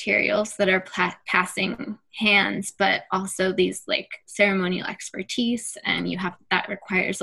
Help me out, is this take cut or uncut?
uncut